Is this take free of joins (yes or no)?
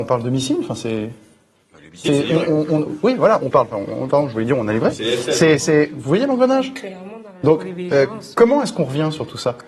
yes